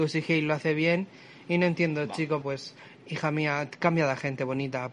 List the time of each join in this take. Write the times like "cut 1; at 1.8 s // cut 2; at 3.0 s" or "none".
cut 1; at 2.4 s